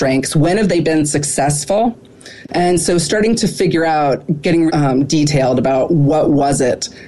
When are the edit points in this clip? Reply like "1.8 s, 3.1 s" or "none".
2.4 s, 4.7 s